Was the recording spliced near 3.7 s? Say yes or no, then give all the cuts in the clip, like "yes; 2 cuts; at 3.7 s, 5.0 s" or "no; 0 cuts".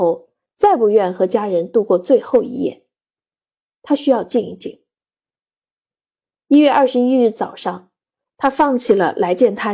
no; 1 cut; at 8.3 s